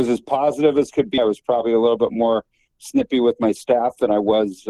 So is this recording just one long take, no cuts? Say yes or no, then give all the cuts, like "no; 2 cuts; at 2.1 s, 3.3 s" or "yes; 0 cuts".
no; 1 cut; at 1.2 s